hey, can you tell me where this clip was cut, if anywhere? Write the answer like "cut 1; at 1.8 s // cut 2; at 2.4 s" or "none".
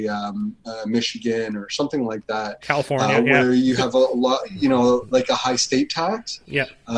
none